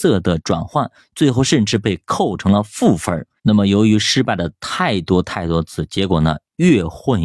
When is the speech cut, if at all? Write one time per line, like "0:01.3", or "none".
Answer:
0:03.4